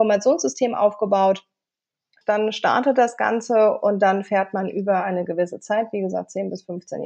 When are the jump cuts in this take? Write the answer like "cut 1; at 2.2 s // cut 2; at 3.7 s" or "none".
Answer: cut 1; at 2.2 s